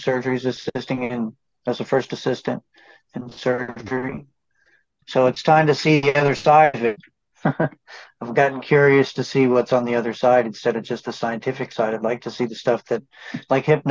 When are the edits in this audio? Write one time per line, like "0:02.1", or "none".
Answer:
0:05.0